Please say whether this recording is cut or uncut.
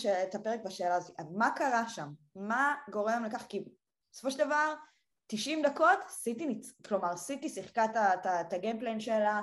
uncut